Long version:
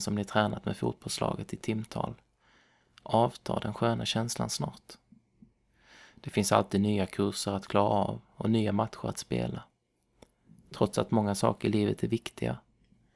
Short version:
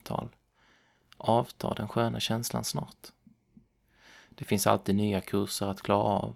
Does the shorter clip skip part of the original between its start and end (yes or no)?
no